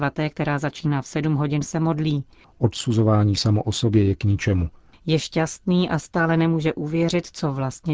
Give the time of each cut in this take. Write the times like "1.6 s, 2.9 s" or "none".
2.4 s, 4.9 s